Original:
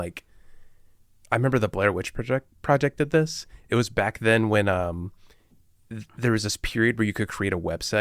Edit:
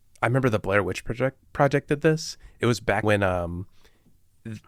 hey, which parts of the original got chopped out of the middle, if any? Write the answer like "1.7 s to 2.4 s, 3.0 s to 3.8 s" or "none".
4.1 s to 4.5 s